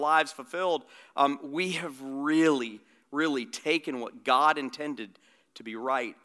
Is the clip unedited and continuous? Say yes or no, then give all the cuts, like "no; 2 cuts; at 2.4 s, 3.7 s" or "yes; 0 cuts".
yes; 0 cuts